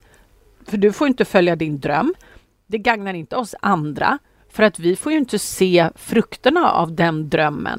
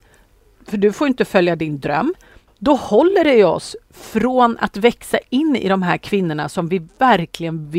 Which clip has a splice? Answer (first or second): second